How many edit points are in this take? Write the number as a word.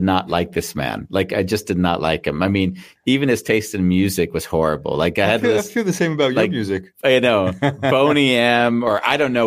zero